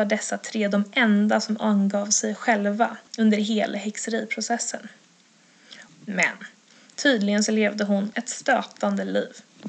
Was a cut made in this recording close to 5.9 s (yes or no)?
yes